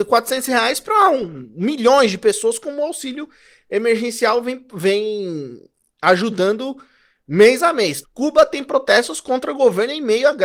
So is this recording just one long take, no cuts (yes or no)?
no